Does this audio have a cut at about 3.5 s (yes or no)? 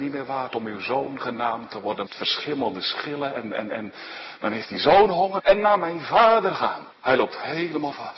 no